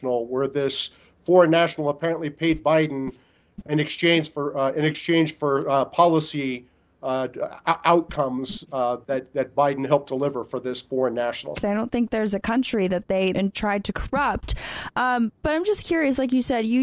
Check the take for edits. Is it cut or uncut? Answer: cut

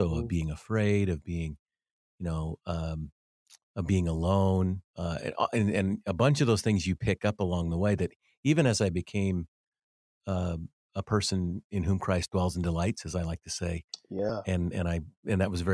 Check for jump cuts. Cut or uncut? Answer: uncut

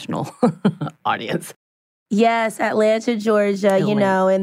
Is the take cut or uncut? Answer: uncut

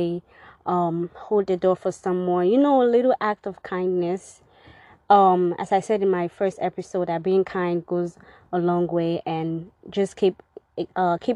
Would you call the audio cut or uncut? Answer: uncut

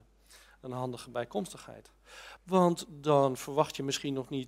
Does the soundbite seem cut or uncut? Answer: cut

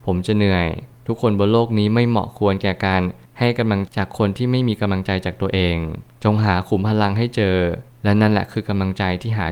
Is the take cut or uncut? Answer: cut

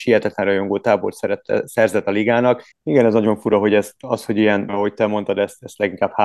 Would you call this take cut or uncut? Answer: cut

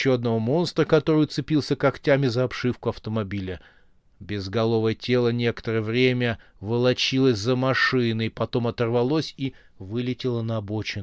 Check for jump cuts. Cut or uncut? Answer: uncut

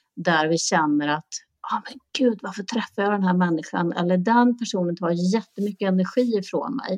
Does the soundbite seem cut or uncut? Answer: uncut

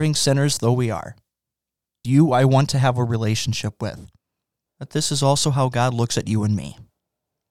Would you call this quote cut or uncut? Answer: cut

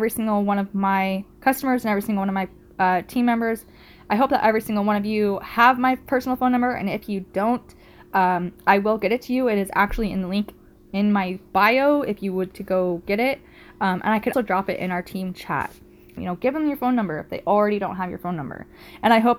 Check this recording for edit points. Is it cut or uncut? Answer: cut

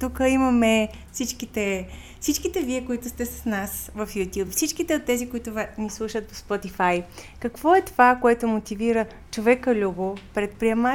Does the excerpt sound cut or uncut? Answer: uncut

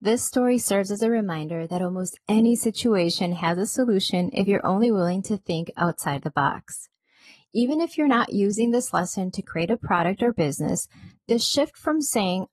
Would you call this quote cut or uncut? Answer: uncut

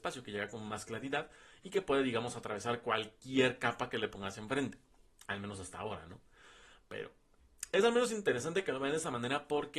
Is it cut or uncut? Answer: uncut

